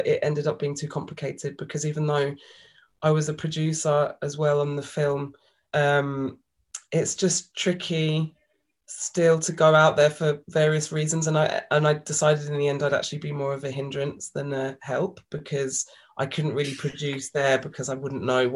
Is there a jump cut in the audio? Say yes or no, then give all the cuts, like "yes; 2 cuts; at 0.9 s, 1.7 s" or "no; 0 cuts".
no; 0 cuts